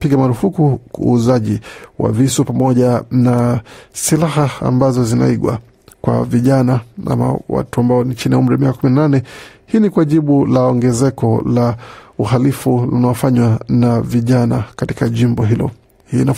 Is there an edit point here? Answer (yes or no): no